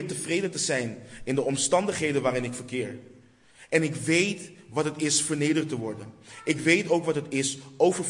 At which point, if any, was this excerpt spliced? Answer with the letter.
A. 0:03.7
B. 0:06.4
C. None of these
C